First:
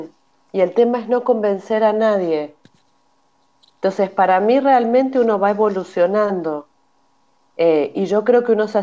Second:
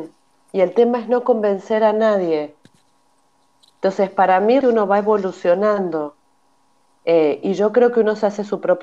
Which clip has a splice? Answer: second; 1 cut; at 4.6 s

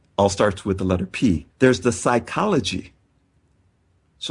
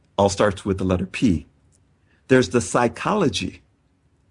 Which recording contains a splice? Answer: first; 1 cut; at 1.5 s

